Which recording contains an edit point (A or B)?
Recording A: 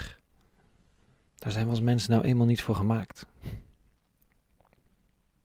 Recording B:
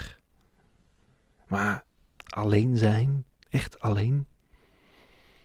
A